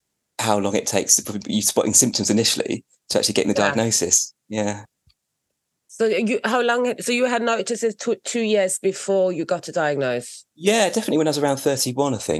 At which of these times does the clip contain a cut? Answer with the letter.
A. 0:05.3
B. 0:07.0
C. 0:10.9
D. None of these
D